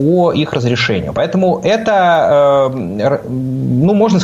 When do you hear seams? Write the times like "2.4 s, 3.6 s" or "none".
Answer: none